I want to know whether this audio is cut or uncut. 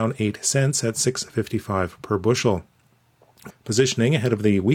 cut